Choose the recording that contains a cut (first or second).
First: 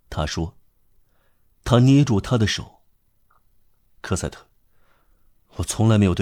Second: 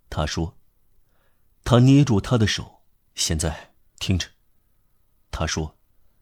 second